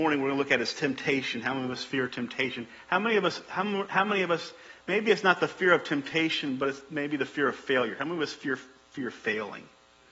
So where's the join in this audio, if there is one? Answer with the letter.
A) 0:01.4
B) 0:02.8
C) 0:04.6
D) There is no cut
D